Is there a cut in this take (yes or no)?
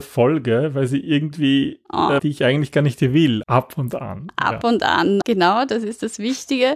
yes